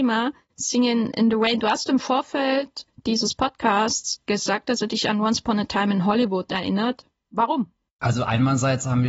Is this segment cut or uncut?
uncut